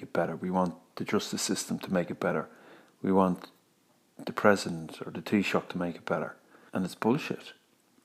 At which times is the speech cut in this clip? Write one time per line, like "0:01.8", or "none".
0:06.7